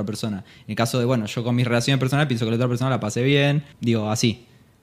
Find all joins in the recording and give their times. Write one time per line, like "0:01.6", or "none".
none